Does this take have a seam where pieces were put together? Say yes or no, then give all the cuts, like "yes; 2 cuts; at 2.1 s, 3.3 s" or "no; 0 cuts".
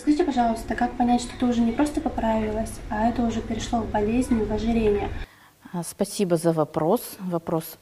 no; 0 cuts